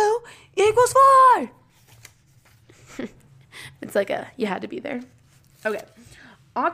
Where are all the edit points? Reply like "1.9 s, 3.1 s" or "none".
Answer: none